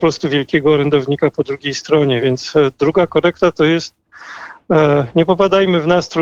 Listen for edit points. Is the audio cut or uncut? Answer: uncut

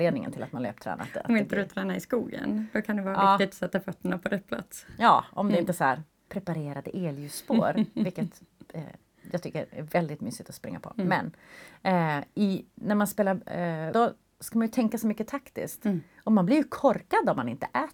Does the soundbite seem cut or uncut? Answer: cut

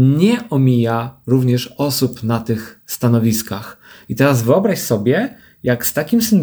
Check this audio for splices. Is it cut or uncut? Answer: uncut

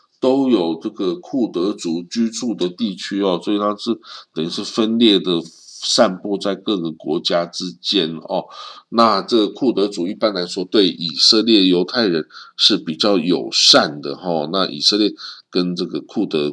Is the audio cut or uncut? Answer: uncut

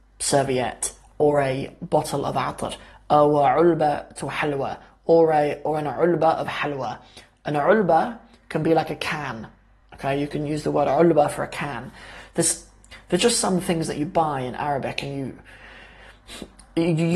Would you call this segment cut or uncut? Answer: uncut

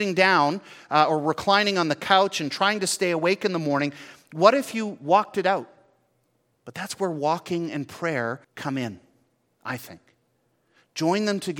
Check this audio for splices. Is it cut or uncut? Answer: cut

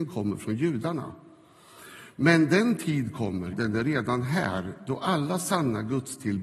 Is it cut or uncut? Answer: cut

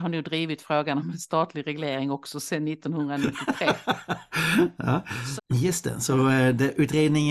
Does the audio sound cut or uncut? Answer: cut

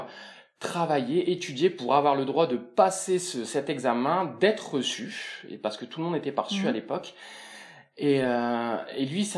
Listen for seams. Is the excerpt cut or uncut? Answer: uncut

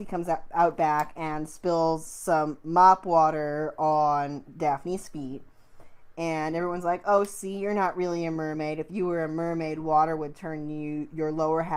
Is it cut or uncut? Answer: uncut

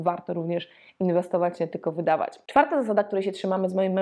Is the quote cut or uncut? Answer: uncut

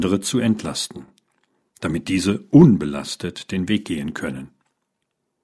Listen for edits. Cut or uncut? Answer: uncut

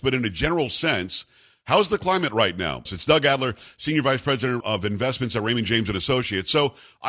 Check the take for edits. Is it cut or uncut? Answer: cut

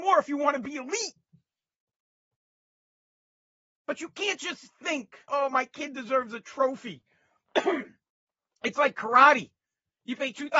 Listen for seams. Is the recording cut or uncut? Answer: cut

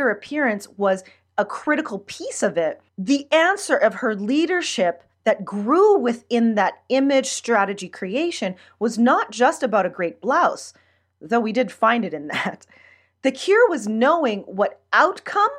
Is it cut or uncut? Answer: cut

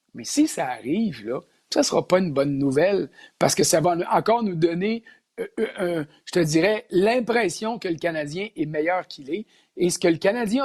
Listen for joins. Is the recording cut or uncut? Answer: uncut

